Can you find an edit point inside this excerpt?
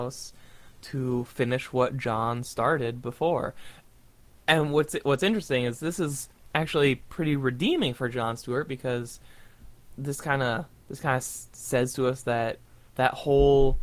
no; 0 cuts

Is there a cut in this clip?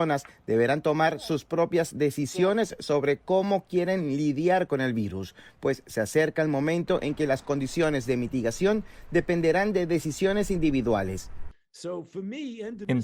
no; 0 cuts

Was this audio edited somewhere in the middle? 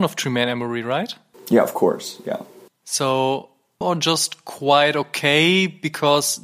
yes; 1 cut; at 3.8 s

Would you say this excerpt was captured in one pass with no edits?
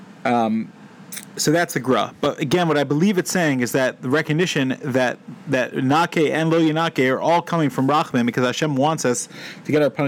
yes; 0 cuts

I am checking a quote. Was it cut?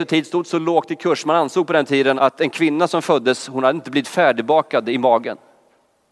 yes; 1 cut; at 2.2 s

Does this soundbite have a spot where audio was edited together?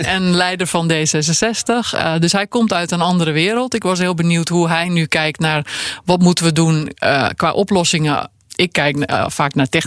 no; 0 cuts

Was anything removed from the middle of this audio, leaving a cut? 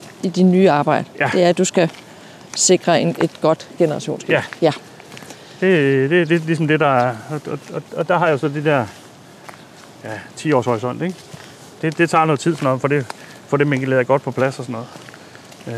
no; 0 cuts

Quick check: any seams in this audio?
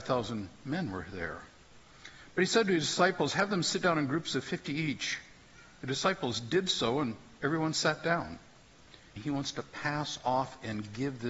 yes; 1 cut; at 9.2 s

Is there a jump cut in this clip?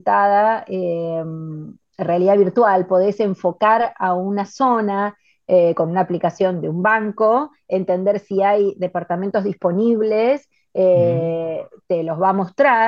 no; 0 cuts

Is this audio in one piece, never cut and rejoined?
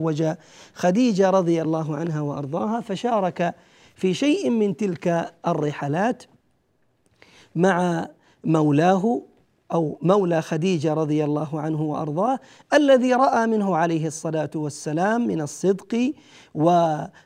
yes; 0 cuts

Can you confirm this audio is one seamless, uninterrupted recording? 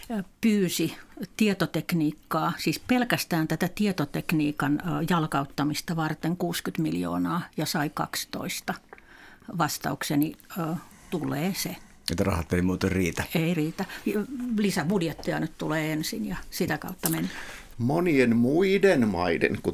no; 2 cuts; at 10.9 s, 17.7 s

